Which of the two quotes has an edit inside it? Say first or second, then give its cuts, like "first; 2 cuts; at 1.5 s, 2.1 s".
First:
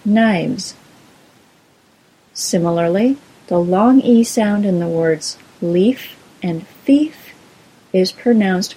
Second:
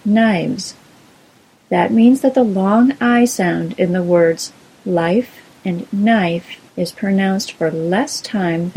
second; 2 cuts; at 1.5 s, 6.7 s